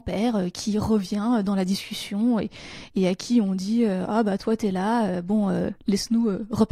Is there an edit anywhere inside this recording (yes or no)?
no